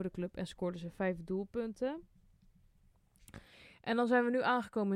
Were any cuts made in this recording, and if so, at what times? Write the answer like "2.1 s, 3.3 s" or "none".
none